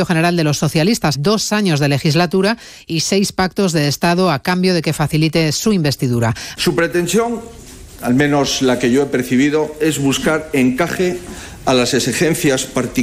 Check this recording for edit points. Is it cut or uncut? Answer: cut